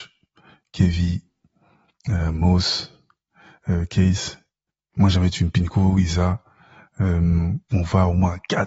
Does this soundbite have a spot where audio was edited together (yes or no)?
no